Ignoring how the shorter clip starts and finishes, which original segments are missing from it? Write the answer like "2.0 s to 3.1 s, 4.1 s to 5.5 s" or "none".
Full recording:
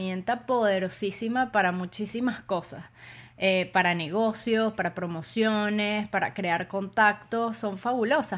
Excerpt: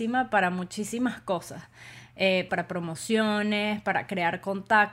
3.7 s to 4.8 s